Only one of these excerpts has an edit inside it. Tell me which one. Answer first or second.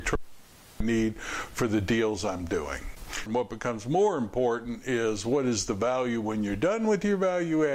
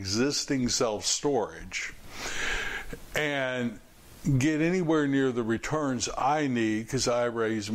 first